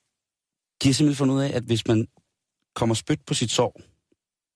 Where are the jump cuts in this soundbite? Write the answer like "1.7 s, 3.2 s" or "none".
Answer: none